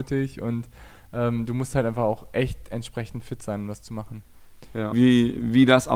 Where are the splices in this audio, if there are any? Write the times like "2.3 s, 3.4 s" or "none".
4.9 s